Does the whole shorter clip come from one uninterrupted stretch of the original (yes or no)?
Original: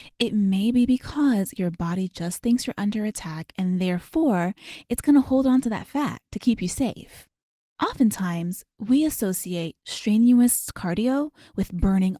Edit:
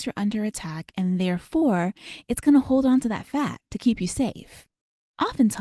yes